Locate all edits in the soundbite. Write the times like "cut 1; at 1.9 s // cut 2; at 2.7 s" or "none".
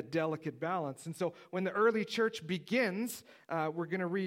none